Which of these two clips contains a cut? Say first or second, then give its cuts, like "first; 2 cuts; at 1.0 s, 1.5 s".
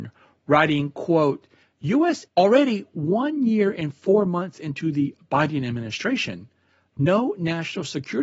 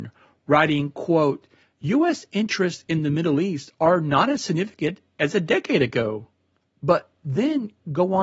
first; 1 cut; at 2.3 s